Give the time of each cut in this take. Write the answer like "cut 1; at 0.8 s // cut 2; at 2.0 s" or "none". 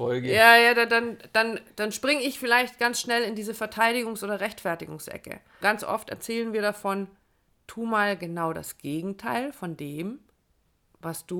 cut 1; at 5.6 s